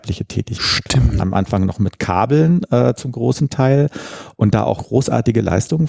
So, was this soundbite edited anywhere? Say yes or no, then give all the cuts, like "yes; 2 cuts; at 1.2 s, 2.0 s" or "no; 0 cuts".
yes; 2 cuts; at 1.2 s, 4.8 s